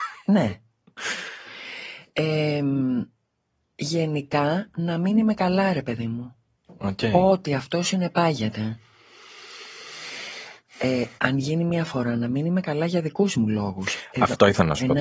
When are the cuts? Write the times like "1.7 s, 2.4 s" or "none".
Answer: 11.2 s